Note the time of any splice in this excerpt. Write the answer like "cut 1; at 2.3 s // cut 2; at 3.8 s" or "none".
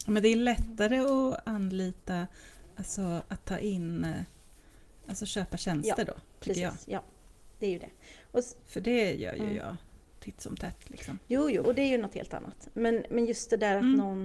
cut 1; at 11.6 s